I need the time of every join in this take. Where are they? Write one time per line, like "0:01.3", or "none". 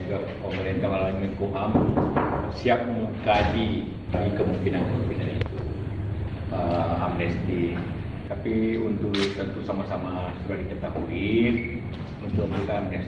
none